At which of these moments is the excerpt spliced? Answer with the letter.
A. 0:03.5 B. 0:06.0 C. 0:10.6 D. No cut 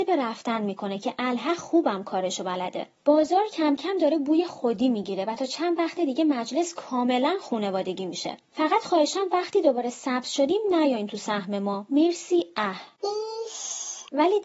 D